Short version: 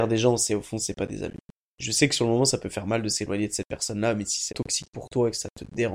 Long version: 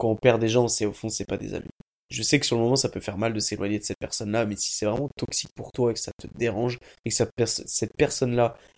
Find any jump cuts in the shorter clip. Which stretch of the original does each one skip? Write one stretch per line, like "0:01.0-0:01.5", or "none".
0:04.8-0:05.1